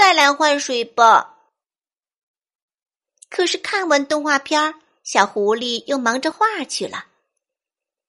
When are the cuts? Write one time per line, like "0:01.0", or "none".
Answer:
0:06.3